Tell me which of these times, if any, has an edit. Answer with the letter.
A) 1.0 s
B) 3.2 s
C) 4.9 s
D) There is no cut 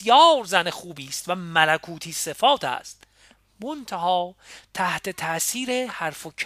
D